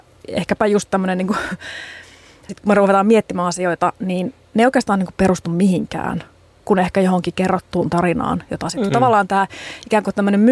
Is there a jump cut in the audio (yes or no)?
yes